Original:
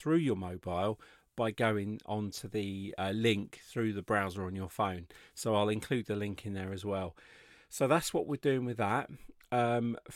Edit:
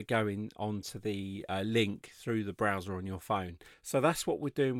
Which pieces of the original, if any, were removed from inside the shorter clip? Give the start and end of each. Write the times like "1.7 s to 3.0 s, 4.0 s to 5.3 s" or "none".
5.2 s to 7.6 s